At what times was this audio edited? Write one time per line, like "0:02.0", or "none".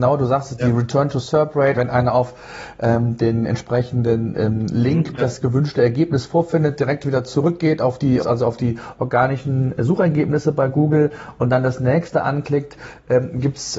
0:01.7
0:05.2
0:08.2